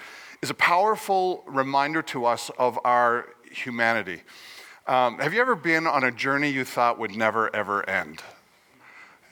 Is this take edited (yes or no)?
no